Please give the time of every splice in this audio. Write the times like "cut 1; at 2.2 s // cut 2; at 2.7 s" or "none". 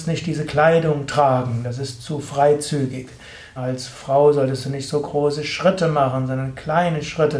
cut 1; at 3.6 s